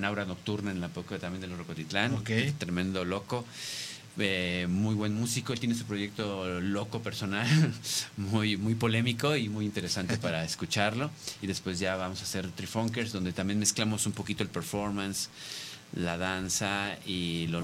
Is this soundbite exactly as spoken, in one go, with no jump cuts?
yes; 0 cuts

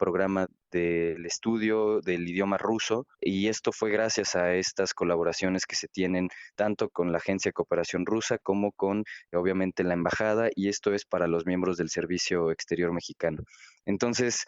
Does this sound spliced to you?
yes; 2 cuts; at 3.1 s, 11.1 s

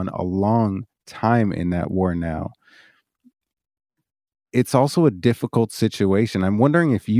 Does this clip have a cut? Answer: no; 0 cuts

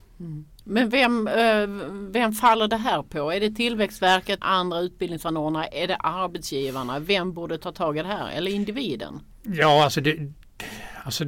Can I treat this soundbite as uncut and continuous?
no; 1 cut; at 4.4 s

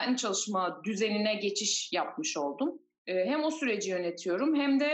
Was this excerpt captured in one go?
no; 1 cut; at 3.0 s

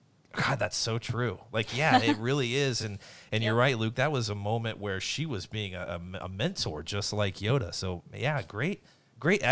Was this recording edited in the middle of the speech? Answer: no; 0 cuts

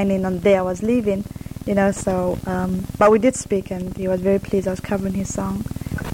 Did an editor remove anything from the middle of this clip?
no; 0 cuts

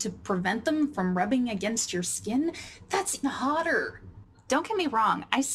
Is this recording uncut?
no; 1 cut; at 3.2 s

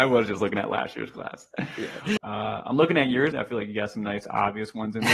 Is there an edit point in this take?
yes; 2 cuts; at 2.2 s, 3.3 s

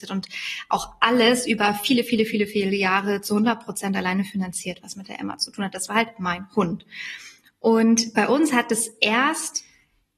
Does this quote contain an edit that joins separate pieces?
no; 0 cuts

